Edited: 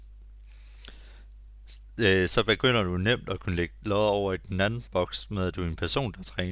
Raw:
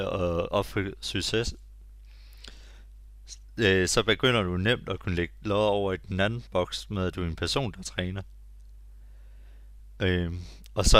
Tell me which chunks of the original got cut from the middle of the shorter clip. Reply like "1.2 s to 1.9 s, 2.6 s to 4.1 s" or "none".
none